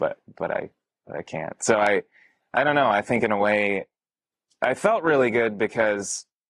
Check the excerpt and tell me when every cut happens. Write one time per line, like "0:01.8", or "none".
none